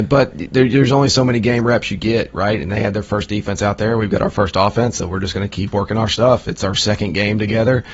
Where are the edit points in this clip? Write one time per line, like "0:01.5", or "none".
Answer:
none